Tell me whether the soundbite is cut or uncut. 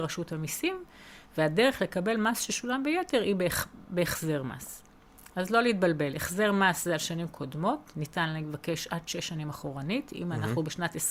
uncut